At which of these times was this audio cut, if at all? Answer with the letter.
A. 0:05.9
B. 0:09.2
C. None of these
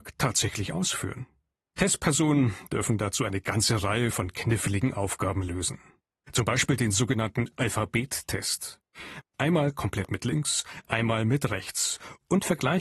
B